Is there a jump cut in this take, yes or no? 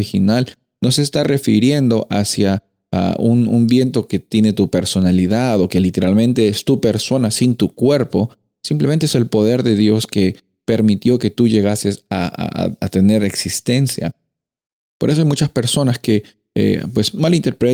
no